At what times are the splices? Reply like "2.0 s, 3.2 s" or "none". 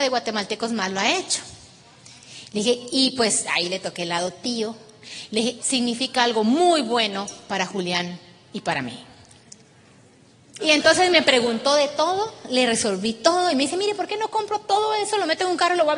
5.6 s, 10.6 s